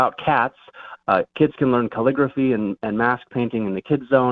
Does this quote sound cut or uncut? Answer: cut